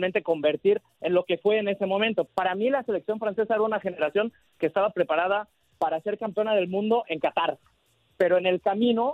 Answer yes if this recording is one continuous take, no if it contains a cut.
no